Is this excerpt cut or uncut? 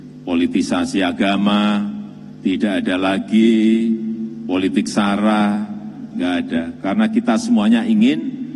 cut